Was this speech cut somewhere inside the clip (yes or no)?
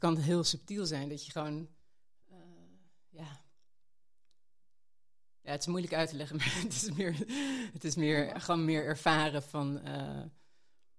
no